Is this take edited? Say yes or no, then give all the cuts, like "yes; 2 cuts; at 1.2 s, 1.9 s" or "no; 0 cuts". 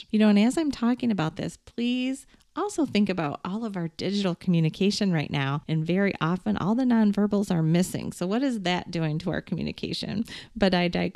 no; 0 cuts